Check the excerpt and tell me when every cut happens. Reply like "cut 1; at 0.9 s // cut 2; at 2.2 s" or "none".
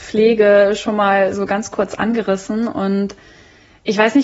none